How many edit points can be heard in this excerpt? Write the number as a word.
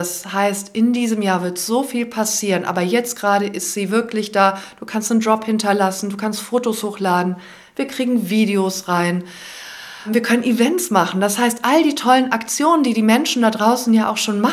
zero